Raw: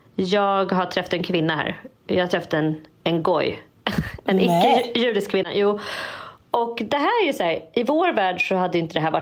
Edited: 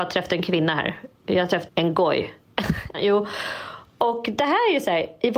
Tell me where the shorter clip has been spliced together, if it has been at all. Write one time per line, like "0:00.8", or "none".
0:01.7
0:02.9